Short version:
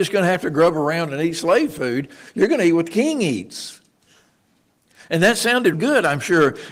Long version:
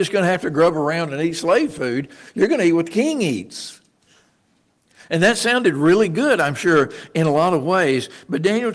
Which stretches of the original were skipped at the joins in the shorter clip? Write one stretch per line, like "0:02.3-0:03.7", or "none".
0:05.7-0:06.1